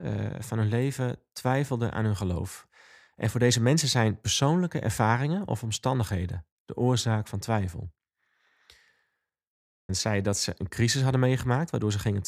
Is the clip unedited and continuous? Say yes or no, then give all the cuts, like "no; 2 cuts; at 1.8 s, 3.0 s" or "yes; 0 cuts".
no; 1 cut; at 9.9 s